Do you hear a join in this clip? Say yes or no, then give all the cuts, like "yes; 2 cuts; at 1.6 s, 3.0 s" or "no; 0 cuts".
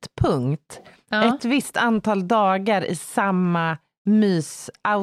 no; 0 cuts